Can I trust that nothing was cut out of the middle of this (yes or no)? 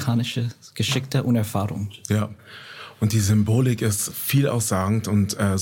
no